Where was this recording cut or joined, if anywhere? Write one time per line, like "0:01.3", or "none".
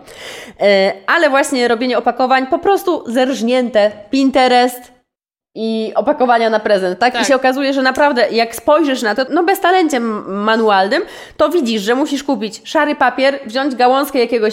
0:09.3